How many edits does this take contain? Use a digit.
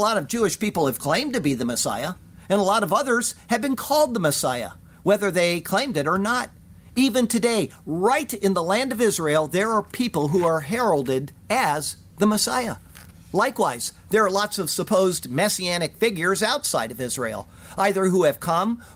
0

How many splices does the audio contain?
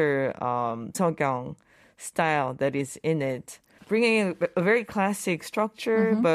2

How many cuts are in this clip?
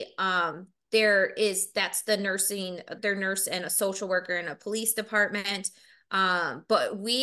1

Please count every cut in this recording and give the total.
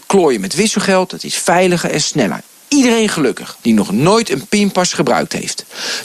1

